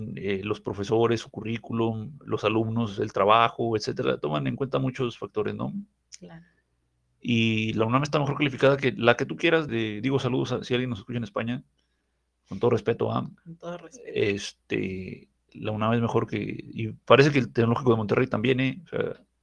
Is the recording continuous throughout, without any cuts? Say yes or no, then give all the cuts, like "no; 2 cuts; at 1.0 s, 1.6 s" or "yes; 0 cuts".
no; 1 cut; at 9.7 s